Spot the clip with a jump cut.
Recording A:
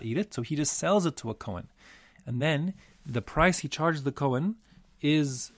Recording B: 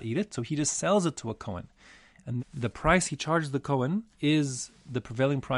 B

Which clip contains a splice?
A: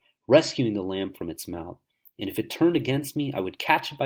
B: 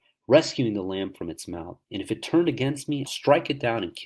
B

